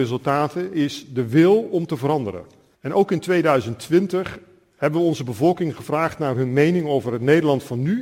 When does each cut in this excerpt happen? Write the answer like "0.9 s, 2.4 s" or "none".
2.7 s